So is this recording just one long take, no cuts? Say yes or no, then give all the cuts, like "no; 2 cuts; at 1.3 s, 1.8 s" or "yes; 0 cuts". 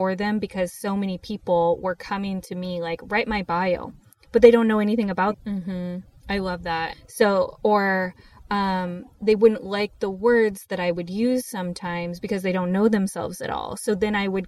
no; 2 cuts; at 5.3 s, 6.9 s